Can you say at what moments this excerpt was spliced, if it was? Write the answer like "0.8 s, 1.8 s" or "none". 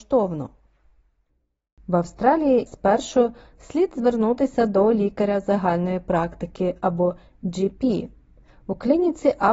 2.7 s